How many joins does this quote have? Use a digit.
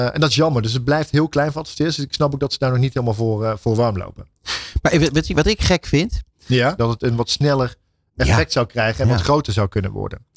1